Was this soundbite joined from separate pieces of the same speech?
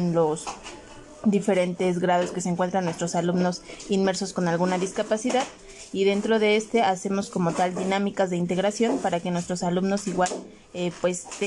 no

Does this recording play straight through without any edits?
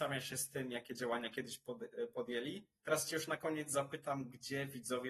no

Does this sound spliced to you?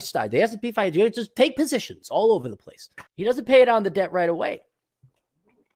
yes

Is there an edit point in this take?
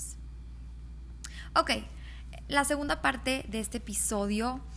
no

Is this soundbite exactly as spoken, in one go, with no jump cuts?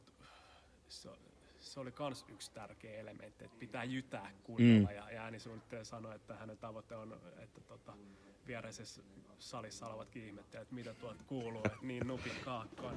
no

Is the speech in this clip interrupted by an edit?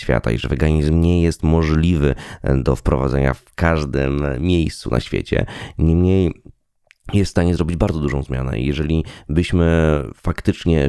no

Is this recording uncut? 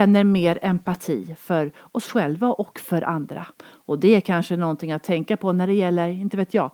no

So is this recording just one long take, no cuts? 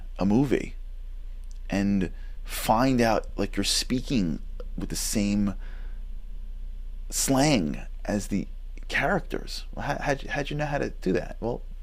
yes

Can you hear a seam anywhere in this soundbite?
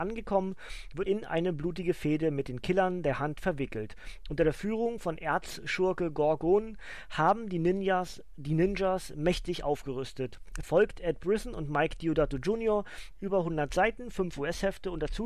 yes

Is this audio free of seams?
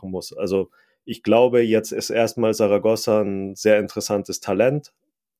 yes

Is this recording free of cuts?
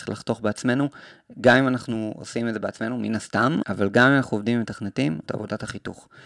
no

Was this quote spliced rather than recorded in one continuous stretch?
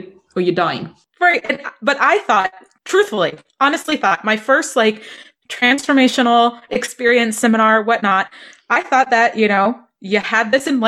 no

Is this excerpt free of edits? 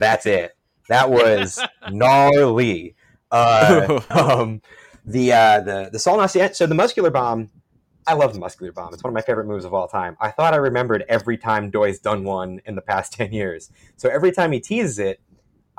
no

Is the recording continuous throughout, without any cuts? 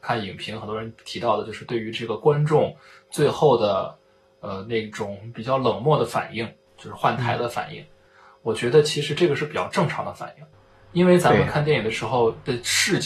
yes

